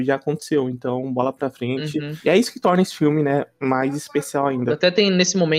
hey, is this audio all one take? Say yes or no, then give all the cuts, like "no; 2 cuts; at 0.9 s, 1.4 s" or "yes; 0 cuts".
yes; 0 cuts